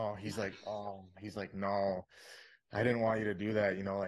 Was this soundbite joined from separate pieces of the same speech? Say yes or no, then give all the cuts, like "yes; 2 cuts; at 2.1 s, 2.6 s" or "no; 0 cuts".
no; 0 cuts